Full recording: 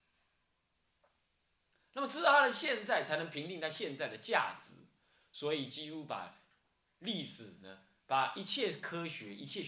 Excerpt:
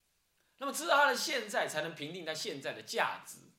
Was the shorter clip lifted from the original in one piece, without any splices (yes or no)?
yes